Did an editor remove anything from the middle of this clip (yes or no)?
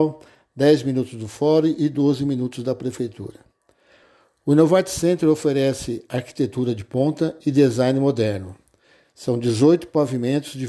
no